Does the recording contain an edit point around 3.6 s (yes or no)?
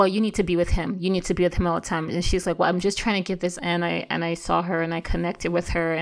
yes